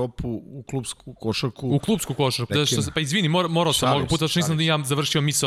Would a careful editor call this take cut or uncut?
cut